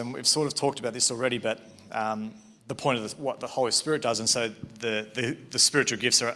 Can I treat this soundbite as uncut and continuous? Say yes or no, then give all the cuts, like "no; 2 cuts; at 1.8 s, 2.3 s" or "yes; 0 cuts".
yes; 0 cuts